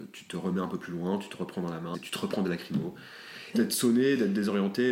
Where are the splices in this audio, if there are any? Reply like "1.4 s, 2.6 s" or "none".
1.9 s, 3.5 s